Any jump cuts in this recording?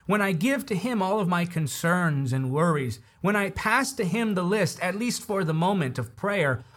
no; 0 cuts

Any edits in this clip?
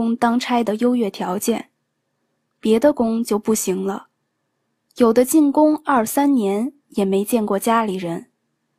no; 0 cuts

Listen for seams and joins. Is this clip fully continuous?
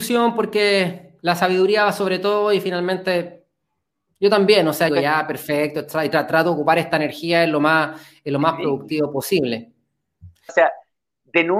no; 2 cuts; at 4.9 s, 10.5 s

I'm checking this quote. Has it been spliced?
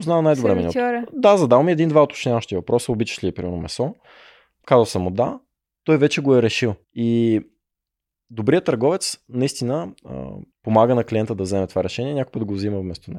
yes; 2 cuts; at 6.8 s, 10.5 s

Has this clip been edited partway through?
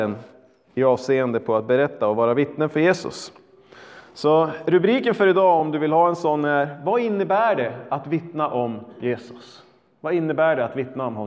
no; 0 cuts

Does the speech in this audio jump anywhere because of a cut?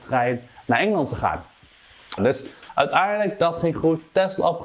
yes; 1 cut; at 2.2 s

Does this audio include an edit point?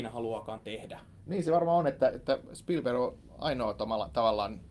no; 0 cuts

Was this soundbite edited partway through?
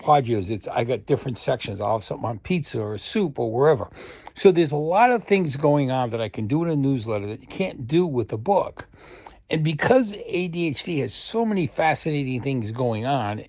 no; 0 cuts

